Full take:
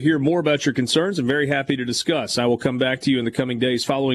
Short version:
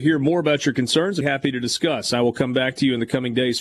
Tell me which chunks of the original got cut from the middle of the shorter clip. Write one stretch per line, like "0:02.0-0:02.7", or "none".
0:01.2-0:01.5